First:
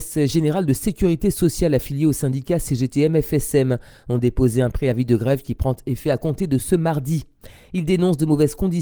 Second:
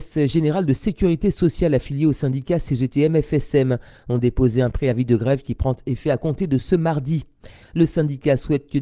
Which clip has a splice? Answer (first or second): second